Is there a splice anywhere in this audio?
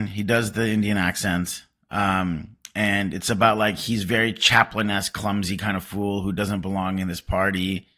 no; 0 cuts

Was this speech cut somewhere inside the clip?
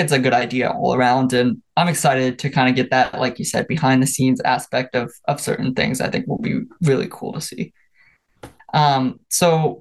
yes; 1 cut; at 8.6 s

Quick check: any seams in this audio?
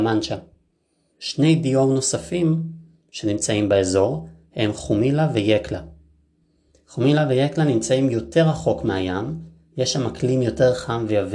yes; 1 cut; at 1.1 s

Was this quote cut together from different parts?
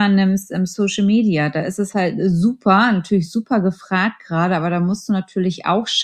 no; 0 cuts

